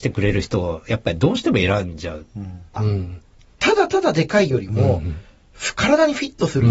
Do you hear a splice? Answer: yes; 1 cut; at 2.8 s

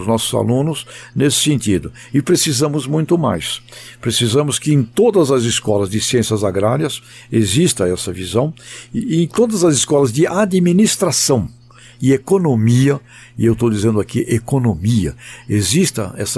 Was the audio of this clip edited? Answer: no; 0 cuts

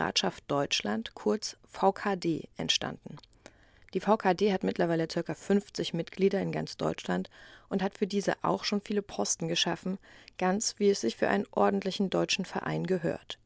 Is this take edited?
no; 0 cuts

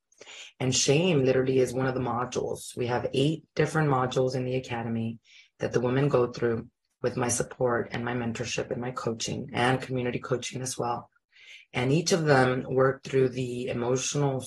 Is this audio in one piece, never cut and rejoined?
yes; 0 cuts

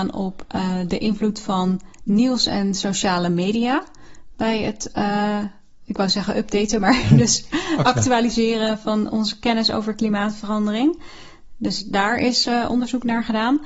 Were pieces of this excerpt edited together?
no; 0 cuts

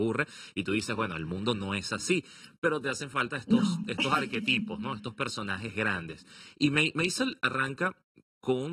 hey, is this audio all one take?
yes; 0 cuts

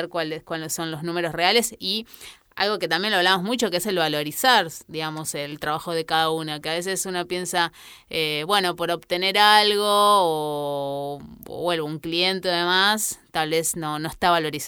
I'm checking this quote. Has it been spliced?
no; 0 cuts

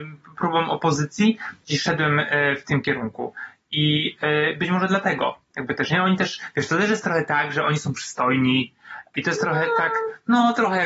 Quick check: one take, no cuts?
yes; 0 cuts

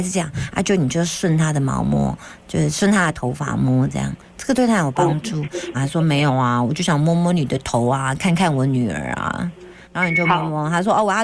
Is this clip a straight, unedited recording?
no; 2 cuts; at 5.7 s, 9.8 s

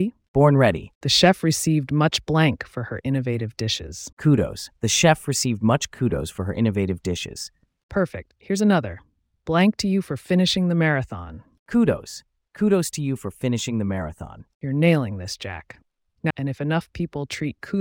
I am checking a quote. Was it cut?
yes; 2 cuts; at 4.1 s, 16.3 s

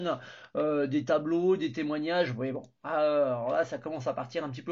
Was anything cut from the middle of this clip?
no; 0 cuts

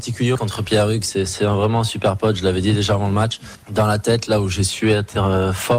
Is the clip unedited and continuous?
no; 1 cut; at 3.6 s

